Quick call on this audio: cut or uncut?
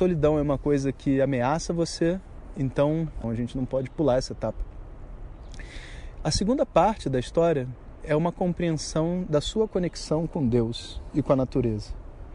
cut